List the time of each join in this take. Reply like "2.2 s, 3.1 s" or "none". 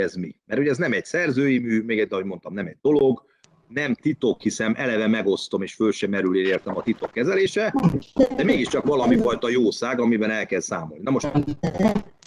none